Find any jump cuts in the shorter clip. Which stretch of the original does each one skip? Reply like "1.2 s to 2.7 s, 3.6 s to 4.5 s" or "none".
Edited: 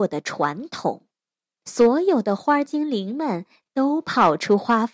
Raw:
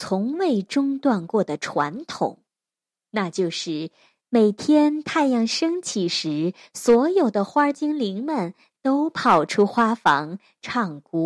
3.0 s to 6.7 s